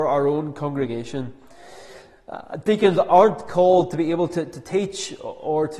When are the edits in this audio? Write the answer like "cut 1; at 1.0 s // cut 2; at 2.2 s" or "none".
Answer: none